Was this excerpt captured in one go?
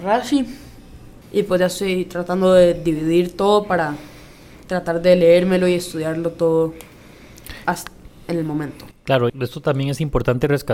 no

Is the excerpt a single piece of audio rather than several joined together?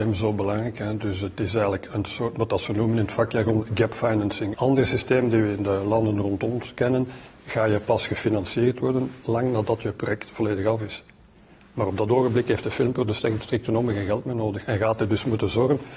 no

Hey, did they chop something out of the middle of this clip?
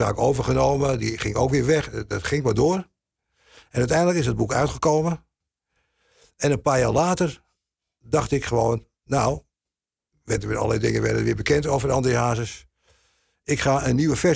no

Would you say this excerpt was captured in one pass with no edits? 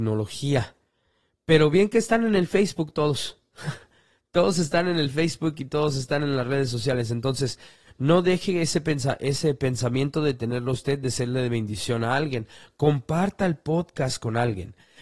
yes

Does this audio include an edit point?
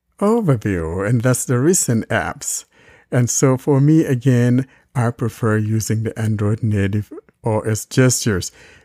no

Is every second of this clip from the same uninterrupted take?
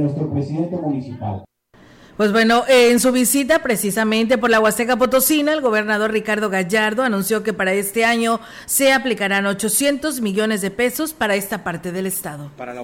yes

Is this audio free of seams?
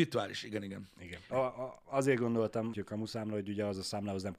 no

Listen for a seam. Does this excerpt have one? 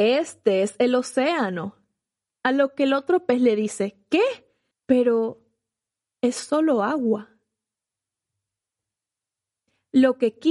yes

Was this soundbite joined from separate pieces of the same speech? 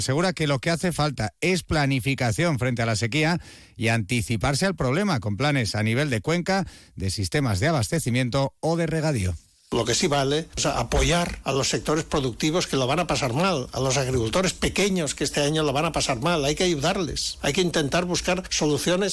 no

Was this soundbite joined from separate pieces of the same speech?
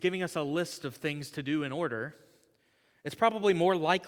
no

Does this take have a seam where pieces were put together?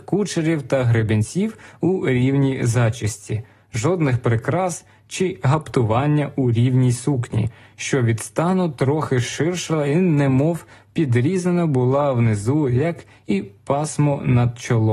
no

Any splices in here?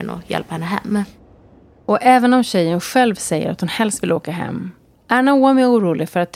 no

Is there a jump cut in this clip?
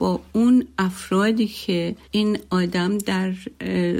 yes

